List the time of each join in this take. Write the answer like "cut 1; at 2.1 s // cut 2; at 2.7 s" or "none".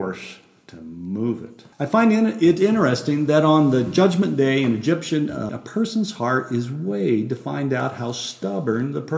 cut 1; at 1.7 s // cut 2; at 5.5 s